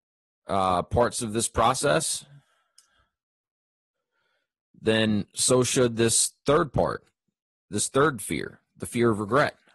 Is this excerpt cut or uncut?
uncut